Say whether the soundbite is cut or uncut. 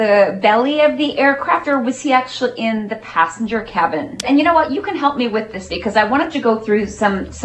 cut